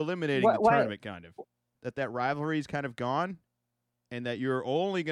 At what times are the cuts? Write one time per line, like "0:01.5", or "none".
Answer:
0:01.7